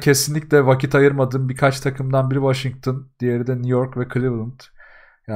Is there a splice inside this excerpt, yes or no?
no